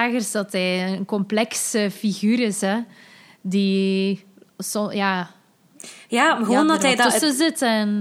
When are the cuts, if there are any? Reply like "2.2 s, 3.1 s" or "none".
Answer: none